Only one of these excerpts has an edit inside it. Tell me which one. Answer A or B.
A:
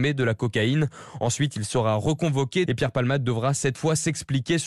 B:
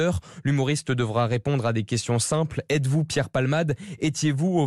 A